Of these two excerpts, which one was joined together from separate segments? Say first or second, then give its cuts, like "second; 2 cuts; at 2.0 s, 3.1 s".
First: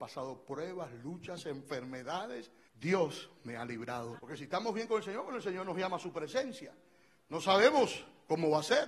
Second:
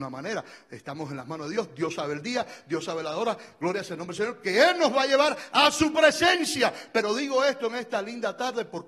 first; 2 cuts; at 2.7 s, 4.2 s